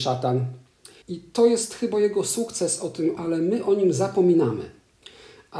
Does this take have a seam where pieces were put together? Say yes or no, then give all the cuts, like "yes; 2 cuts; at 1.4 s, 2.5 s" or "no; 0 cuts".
yes; 2 cuts; at 1.0 s, 3.2 s